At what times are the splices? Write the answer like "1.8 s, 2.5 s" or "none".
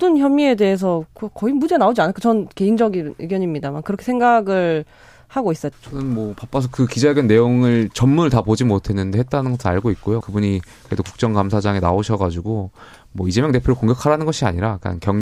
5.7 s, 10.2 s